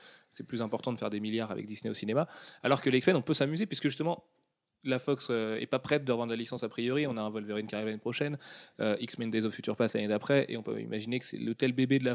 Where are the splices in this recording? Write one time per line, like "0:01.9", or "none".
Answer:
none